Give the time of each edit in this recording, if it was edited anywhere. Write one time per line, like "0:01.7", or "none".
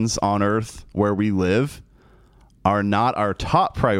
none